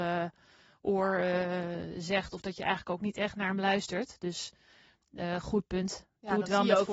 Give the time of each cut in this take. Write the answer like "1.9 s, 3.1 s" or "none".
none